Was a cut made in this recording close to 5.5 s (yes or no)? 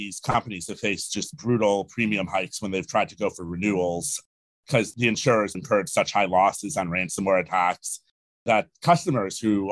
yes